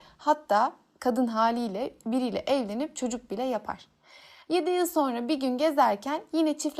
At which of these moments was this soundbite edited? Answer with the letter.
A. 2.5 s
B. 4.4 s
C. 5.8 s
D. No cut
D